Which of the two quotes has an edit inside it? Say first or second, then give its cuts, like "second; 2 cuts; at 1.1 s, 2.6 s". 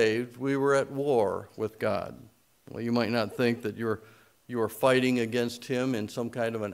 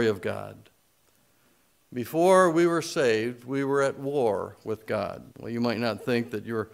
second; 1 cut; at 5.3 s